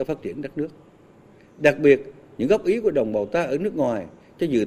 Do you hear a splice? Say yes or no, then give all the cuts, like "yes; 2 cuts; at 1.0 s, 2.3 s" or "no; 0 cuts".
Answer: no; 0 cuts